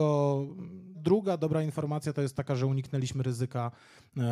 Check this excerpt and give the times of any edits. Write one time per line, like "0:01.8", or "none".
0:00.9